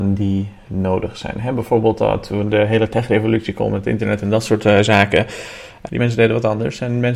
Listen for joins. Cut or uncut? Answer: cut